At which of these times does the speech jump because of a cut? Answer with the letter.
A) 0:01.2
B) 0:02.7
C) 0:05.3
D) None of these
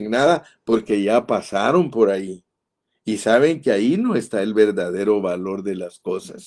D